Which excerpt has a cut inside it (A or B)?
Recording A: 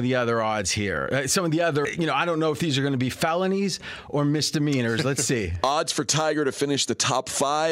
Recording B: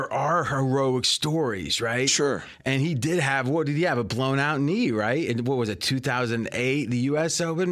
A